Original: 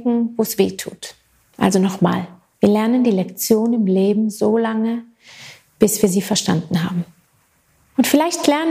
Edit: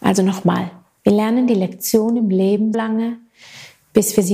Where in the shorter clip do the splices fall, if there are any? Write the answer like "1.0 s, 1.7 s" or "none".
2.7 s